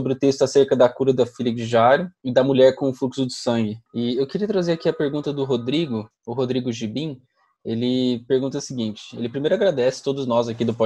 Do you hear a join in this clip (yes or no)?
yes